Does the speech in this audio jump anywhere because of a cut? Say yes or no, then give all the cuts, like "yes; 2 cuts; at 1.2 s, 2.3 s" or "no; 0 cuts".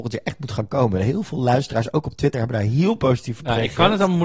no; 0 cuts